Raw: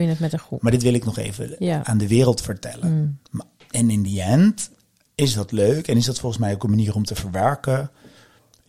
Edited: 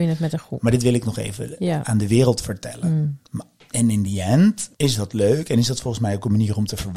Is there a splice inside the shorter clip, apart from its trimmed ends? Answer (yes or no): yes